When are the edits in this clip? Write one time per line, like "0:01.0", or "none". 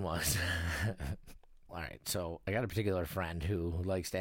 0:01.7